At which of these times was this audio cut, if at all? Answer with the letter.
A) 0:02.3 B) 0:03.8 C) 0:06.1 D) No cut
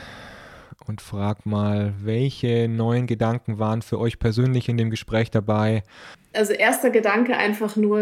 C